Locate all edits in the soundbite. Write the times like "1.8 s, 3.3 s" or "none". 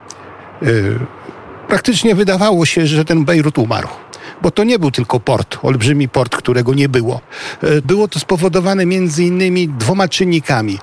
7.8 s